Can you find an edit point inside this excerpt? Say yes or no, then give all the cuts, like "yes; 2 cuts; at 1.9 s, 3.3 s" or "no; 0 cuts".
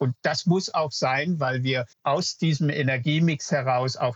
yes; 1 cut; at 1.9 s